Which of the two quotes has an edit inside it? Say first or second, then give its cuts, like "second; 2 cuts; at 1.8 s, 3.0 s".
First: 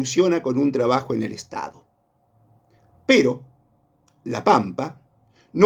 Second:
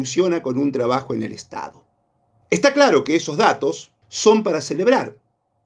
second; 2 cuts; at 2.4 s, 4.0 s